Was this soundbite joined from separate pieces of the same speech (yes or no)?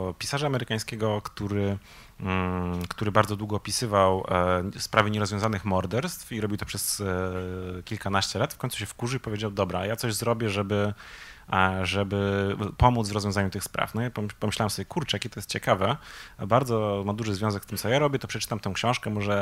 no